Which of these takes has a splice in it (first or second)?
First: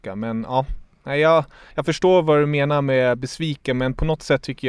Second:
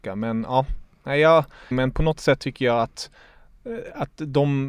second